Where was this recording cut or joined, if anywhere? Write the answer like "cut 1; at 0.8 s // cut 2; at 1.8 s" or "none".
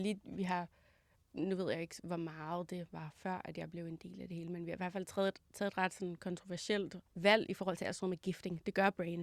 cut 1; at 7.1 s

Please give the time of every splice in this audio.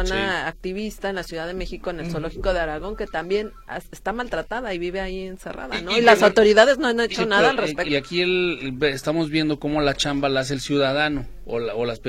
cut 1; at 7.9 s

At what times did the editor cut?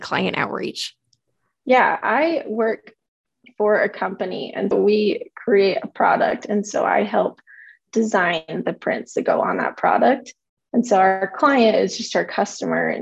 cut 1; at 4.7 s

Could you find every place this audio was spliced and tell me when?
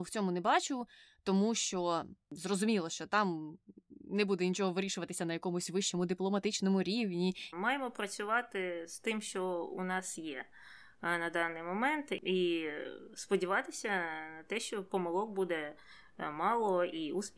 cut 1; at 7.5 s

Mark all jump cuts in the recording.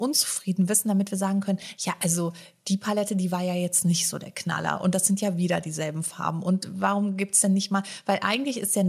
none

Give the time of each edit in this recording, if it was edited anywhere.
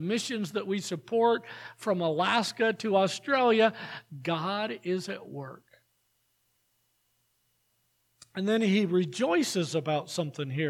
none

